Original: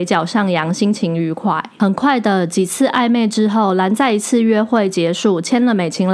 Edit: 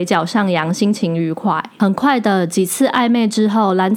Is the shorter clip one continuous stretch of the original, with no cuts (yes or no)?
yes